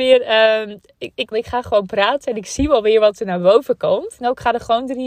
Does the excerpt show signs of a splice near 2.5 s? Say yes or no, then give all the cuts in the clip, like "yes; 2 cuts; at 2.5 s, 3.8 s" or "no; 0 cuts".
no; 2 cuts; at 1.3 s, 4.2 s